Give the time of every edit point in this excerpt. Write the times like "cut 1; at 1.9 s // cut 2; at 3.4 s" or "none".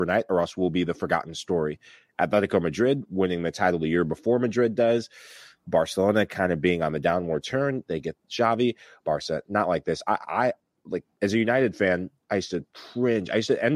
cut 1; at 9.0 s

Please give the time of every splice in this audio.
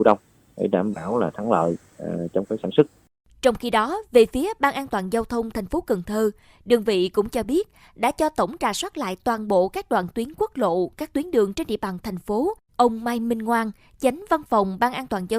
cut 1; at 12.7 s

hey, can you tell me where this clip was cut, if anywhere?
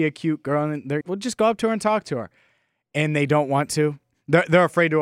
cut 1; at 1.0 s

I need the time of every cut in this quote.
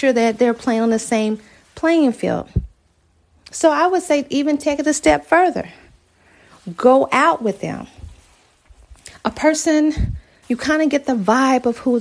cut 1; at 10.4 s

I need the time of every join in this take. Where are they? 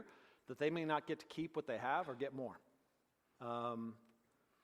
cut 1; at 3.3 s

